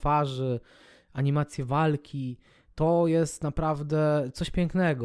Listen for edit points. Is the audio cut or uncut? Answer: uncut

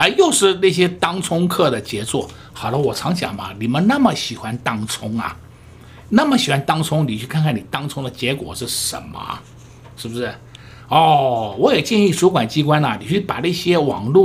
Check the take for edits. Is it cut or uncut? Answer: uncut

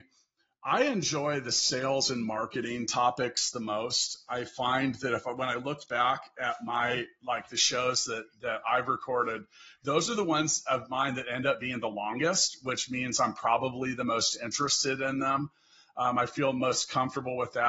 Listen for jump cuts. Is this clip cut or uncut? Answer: uncut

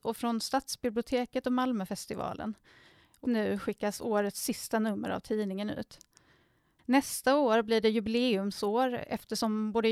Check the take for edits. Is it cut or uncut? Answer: cut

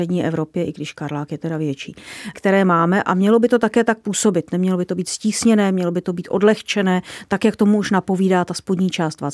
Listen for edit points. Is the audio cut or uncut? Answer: cut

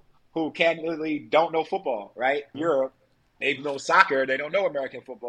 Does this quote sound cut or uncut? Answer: cut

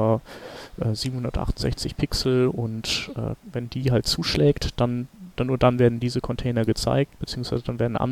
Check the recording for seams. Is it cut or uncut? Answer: cut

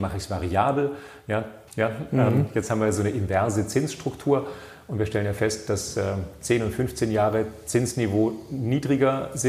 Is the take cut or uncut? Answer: cut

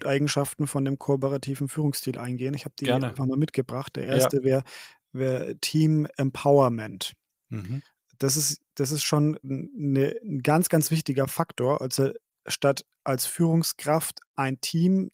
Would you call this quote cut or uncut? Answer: cut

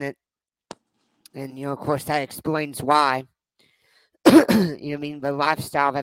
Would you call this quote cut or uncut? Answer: uncut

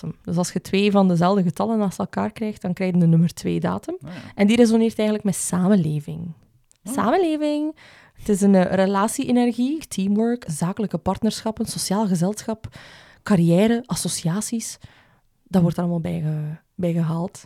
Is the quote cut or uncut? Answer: cut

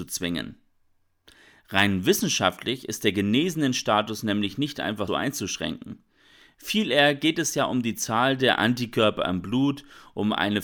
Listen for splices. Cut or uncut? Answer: cut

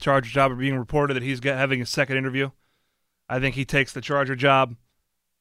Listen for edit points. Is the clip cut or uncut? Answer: uncut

